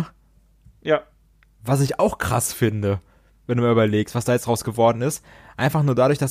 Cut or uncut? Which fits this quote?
uncut